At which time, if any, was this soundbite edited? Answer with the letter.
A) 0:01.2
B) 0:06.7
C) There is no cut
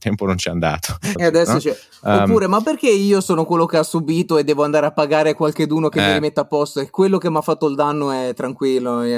A